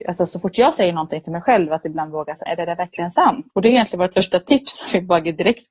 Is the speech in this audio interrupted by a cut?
yes; 2 cuts; at 2.5 s, 3.5 s

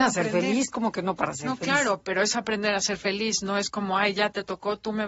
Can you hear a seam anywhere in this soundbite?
no; 0 cuts

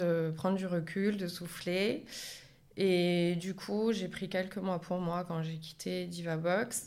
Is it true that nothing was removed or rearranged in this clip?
yes; 0 cuts

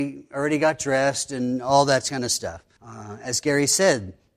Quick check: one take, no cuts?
no; 1 cut; at 2.8 s

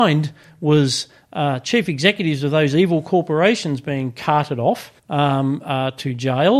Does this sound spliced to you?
yes; 1 cut; at 5.0 s

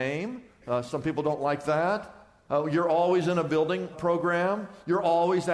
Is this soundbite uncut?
no; 1 cut; at 3.9 s

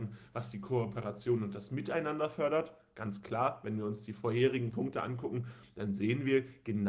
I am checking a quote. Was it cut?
no; 0 cuts

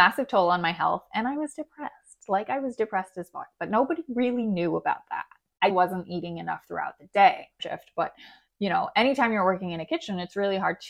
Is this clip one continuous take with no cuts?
no; 2 cuts; at 5.7 s, 7.6 s

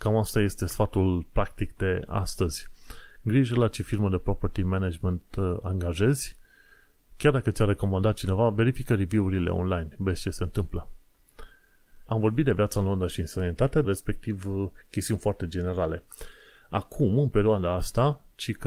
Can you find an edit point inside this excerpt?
yes; 2 cuts; at 12.1 s, 13.8 s

